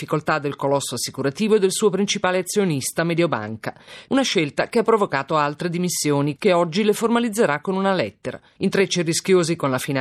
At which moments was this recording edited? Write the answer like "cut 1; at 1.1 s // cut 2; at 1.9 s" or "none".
cut 1; at 4.1 s // cut 2; at 6.4 s // cut 3; at 8.6 s